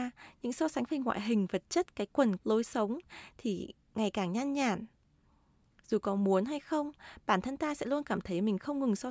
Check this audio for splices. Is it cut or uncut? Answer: cut